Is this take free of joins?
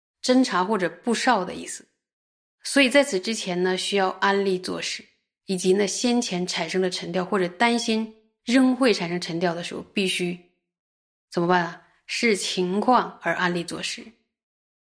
no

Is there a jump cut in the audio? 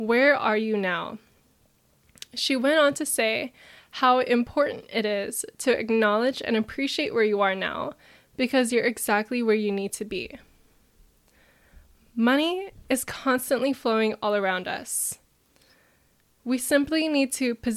no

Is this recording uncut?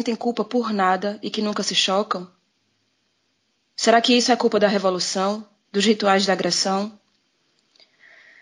no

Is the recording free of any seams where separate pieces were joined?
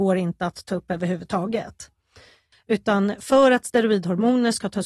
no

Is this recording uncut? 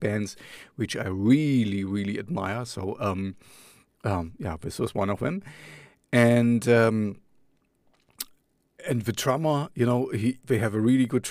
yes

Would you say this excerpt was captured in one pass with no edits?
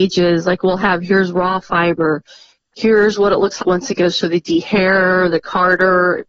no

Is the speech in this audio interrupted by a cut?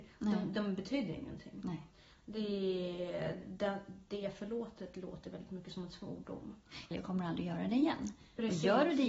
yes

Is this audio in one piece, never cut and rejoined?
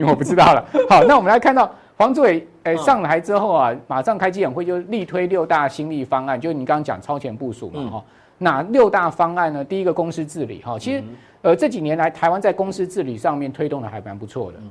yes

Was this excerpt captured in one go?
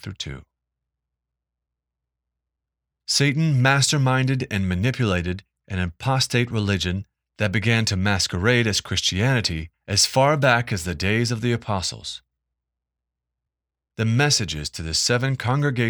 yes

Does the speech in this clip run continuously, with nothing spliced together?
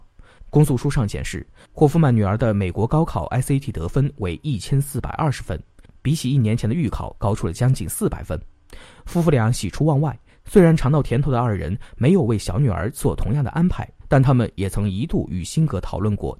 yes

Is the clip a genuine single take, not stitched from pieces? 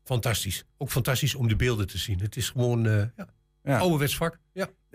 yes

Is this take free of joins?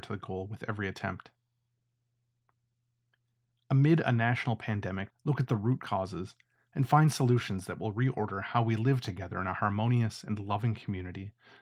no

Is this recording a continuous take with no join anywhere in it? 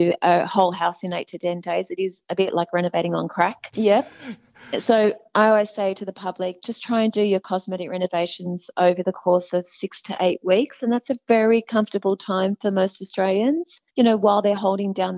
no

